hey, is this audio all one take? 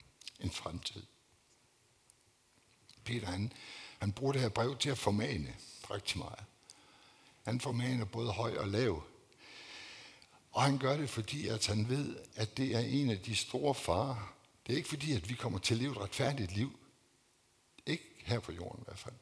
yes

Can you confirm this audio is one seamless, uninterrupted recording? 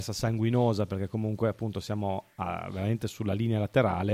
yes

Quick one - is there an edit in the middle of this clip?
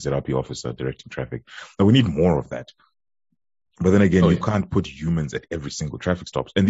no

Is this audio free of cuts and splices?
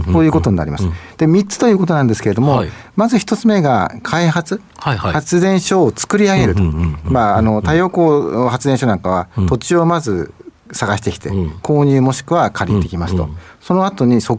yes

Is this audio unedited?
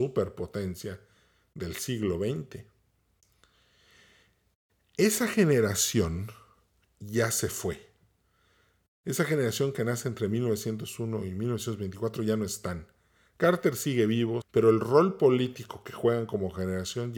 no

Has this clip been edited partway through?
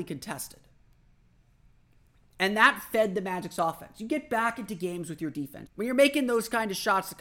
yes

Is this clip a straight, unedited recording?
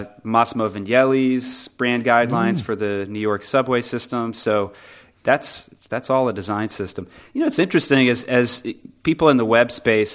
yes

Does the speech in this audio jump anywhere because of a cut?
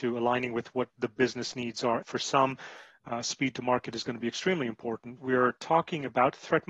yes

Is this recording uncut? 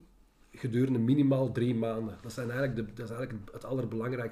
yes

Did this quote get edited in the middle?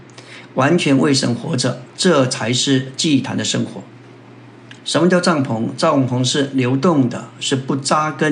yes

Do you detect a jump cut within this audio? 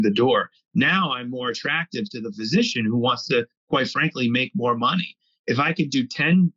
no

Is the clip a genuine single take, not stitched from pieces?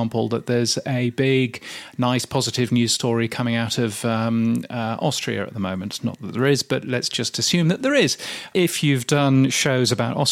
yes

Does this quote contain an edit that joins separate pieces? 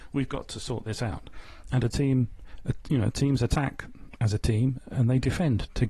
no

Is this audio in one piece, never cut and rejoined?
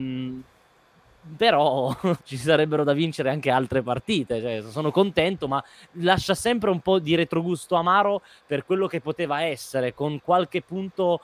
no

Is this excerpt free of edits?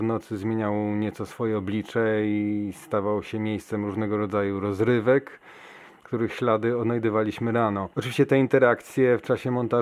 no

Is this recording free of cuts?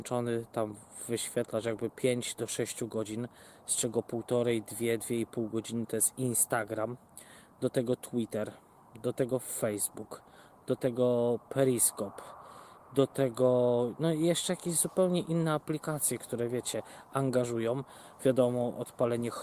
yes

